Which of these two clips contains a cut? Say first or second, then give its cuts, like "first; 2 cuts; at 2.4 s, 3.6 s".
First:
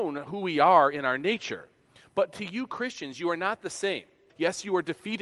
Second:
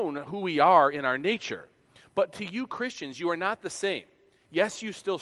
first; 1 cut; at 4.3 s